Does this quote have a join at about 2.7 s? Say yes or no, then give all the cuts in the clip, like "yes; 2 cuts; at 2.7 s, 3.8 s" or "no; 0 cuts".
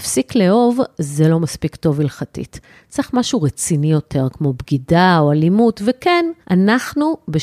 no; 1 cut; at 6.4 s